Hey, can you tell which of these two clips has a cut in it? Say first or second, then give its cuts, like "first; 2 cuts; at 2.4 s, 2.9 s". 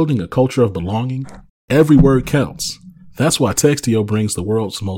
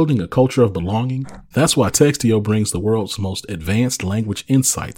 second; 1 cut; at 1.5 s